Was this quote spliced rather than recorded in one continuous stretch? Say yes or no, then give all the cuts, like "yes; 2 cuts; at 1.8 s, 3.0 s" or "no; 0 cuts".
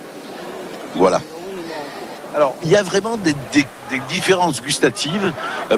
yes; 1 cut; at 2.3 s